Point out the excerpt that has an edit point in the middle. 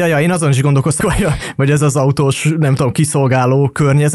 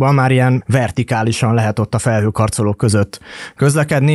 first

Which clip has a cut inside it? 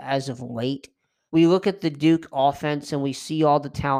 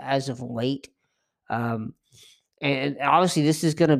first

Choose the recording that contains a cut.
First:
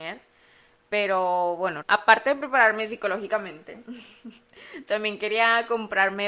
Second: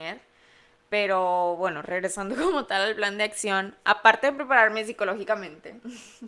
first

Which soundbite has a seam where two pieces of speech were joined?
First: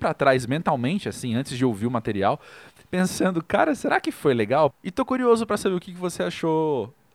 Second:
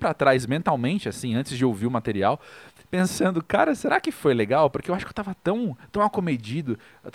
first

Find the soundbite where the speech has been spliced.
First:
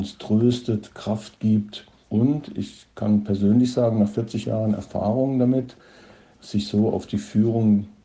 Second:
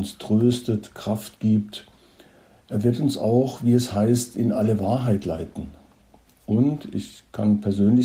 first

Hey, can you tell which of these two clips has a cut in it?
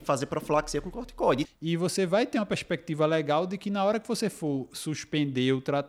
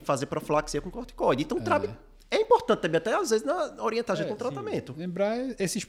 first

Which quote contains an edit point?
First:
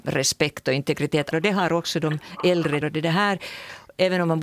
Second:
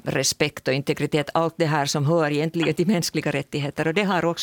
first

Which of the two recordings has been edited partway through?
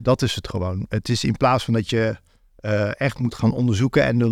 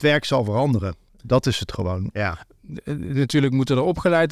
second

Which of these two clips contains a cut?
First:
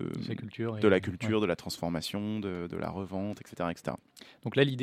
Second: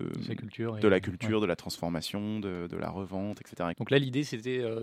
second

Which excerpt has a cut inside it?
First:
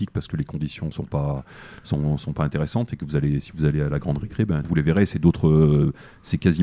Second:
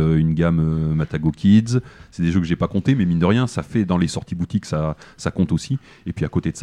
first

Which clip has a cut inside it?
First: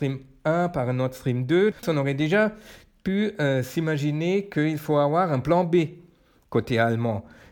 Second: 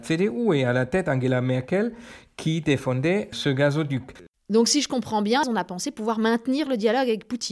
second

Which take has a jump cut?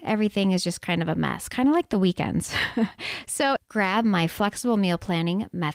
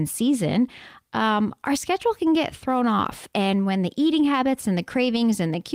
first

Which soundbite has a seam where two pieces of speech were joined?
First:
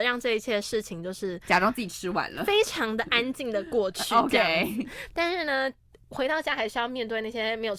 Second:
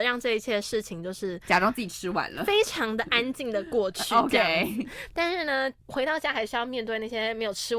second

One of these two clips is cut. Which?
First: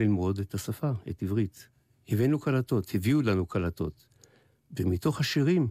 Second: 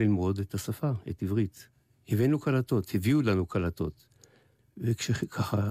second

